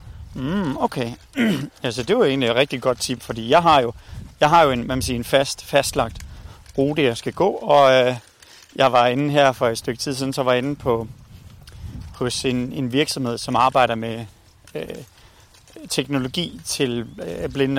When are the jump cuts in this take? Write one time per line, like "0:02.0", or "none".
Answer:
none

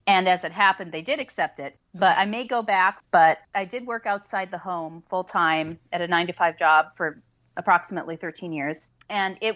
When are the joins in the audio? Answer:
0:01.8
0:03.0

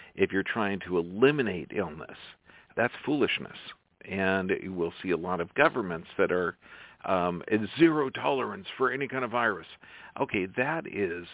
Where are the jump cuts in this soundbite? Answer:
0:02.7

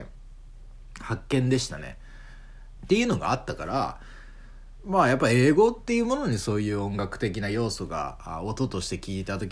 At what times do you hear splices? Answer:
0:02.8

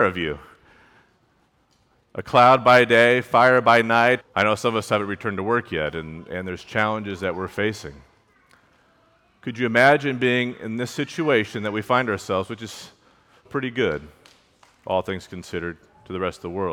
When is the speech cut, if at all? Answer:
0:04.2
0:13.5

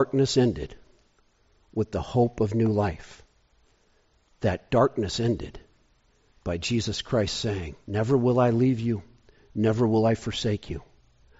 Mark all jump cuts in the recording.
0:07.8

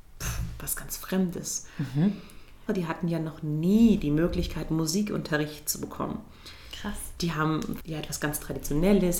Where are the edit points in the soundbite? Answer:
0:02.7
0:07.8

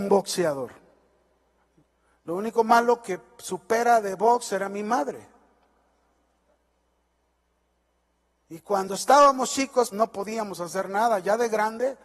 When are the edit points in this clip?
0:09.9

